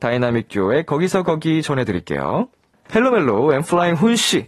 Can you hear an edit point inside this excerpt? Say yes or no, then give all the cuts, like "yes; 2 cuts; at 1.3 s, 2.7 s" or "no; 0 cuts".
yes; 1 cut; at 2.9 s